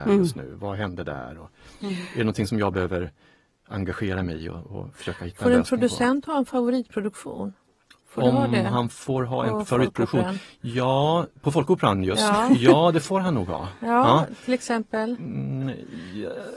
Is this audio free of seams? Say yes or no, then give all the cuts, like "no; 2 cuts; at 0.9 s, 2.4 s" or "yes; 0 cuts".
yes; 0 cuts